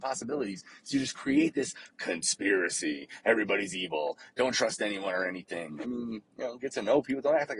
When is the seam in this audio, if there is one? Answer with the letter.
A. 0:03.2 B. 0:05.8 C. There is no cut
B